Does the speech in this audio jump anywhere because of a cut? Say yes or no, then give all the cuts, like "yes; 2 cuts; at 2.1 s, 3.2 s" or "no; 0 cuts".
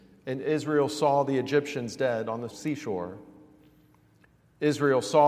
yes; 1 cut; at 2.5 s